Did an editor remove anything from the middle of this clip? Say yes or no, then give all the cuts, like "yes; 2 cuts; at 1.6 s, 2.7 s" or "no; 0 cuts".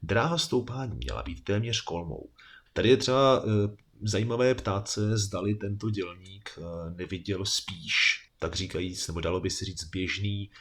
yes; 1 cut; at 2.7 s